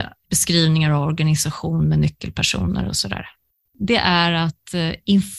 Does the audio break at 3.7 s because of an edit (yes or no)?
yes